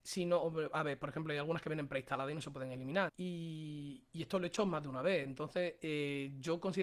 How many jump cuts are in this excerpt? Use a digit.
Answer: 1